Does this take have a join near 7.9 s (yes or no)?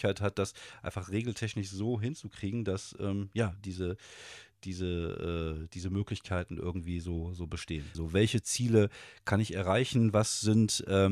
yes